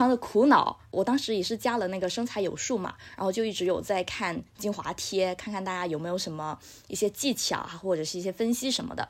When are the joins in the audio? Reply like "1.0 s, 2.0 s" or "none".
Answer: none